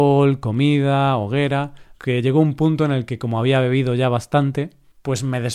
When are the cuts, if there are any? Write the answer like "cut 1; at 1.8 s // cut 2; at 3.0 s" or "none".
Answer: cut 1; at 1.9 s